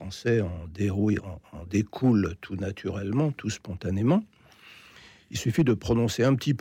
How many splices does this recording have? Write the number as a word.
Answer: one